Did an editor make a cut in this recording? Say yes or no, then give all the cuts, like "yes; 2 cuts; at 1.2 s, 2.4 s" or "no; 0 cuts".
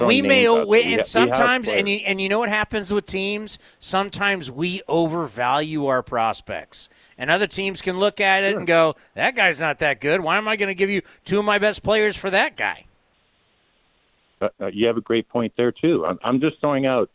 no; 0 cuts